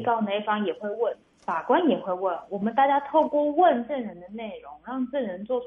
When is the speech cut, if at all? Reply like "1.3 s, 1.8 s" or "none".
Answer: 1.2 s